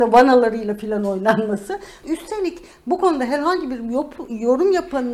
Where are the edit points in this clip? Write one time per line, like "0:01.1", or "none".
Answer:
0:02.0